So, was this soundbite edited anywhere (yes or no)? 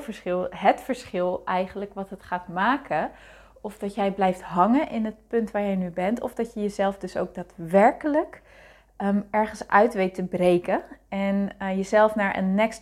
no